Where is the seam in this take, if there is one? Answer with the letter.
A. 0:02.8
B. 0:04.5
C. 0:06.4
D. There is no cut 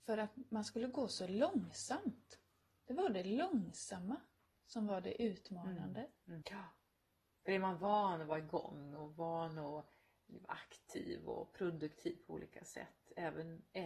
C